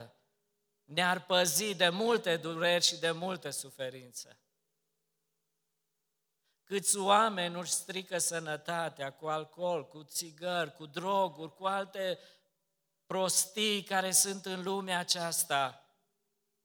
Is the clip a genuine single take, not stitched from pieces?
yes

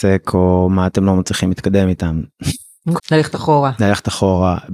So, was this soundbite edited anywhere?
yes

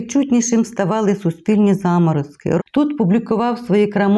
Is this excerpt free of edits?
no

